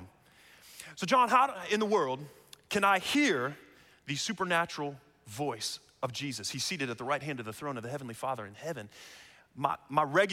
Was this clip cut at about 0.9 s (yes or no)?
no